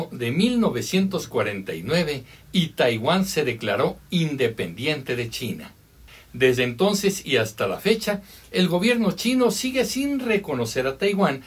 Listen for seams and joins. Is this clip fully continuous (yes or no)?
yes